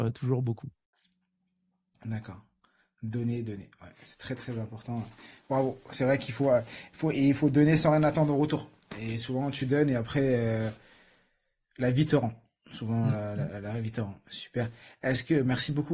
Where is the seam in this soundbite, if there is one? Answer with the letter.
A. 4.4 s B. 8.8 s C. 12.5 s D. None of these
A